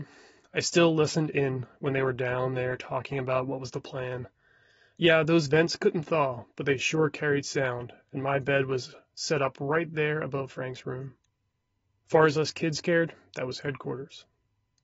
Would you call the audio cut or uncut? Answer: uncut